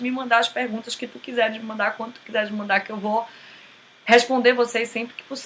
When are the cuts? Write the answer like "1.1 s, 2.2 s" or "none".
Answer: none